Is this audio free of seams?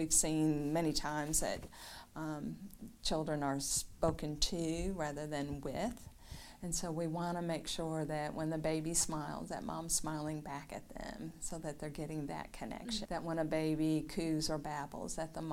no; 1 cut; at 13.1 s

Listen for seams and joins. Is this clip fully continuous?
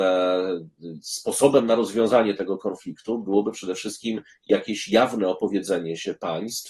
yes; 0 cuts

